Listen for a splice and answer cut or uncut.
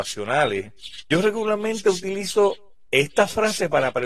uncut